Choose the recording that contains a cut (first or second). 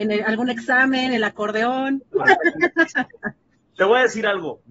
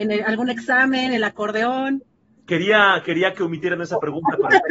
first